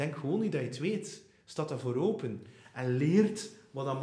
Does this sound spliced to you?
no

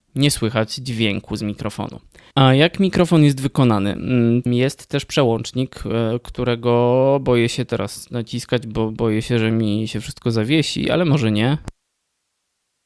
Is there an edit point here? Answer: yes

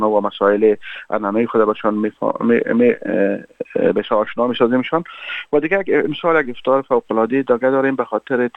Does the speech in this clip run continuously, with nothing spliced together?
yes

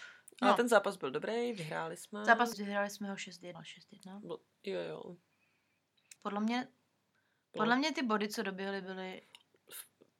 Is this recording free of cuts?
no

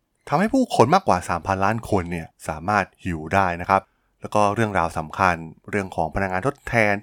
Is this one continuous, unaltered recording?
yes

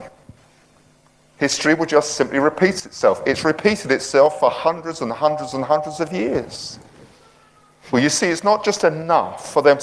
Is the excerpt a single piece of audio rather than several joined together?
no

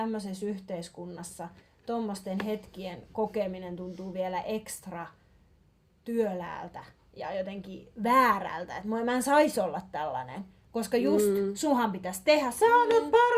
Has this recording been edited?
no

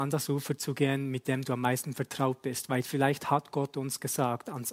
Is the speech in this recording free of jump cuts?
yes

